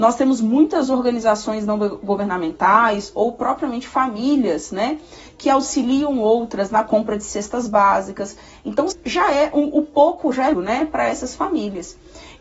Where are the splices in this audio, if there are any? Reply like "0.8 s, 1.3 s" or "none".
8.9 s, 10.5 s